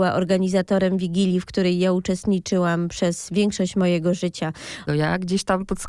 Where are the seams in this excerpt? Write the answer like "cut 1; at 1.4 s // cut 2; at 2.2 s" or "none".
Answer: cut 1; at 4.9 s

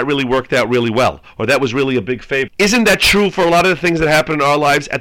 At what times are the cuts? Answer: cut 1; at 2.5 s

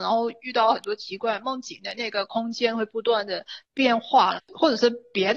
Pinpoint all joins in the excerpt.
cut 1; at 4.3 s

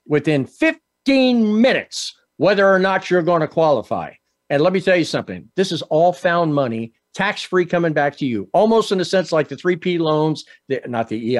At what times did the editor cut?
none

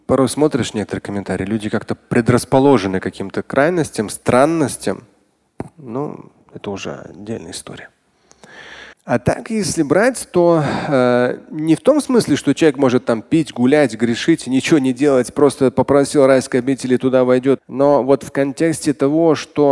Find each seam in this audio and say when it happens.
cut 1; at 8.9 s // cut 2; at 17.6 s

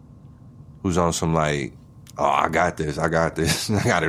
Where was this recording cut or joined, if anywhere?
none

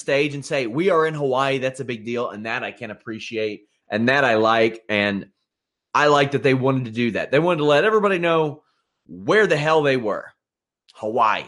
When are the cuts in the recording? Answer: none

